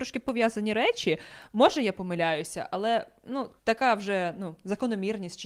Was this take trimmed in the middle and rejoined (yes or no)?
yes